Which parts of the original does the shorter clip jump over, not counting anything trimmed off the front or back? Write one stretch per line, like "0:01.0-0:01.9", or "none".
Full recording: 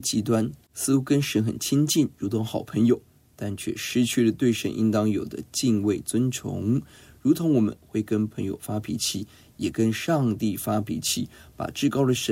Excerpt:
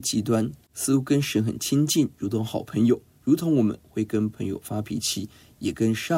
0:03.2-0:07.2